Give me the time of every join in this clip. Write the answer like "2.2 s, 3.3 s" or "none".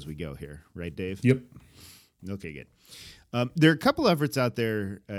none